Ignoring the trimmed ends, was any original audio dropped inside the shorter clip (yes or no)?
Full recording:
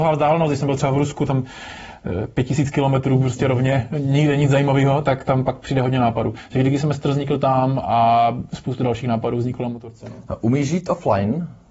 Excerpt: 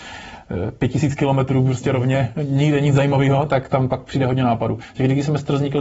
no